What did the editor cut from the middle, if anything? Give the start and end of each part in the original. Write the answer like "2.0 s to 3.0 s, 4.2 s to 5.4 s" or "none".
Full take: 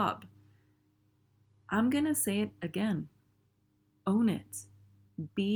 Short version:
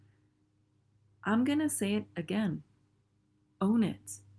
none